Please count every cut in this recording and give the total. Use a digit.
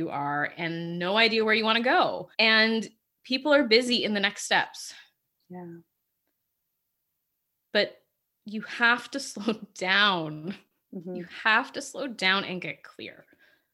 1